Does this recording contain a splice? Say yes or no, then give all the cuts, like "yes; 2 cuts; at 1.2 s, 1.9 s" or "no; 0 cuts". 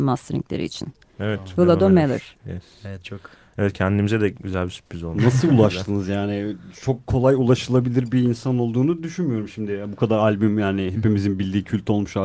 no; 0 cuts